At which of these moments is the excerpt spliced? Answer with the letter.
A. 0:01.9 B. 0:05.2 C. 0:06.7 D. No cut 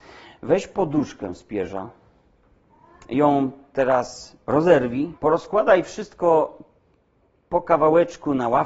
B